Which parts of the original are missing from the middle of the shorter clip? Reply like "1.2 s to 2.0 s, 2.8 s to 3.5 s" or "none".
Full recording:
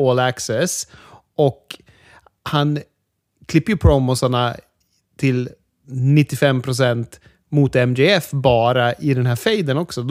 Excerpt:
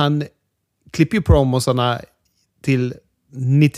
none